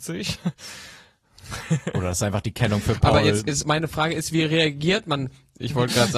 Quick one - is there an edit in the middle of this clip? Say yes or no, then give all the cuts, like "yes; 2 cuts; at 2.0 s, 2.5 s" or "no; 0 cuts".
no; 0 cuts